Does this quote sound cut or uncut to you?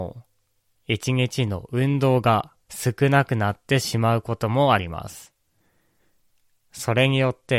cut